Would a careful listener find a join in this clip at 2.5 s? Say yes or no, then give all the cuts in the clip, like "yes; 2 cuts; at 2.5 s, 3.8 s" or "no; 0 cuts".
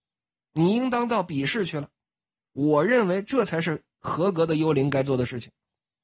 yes; 1 cut; at 2.5 s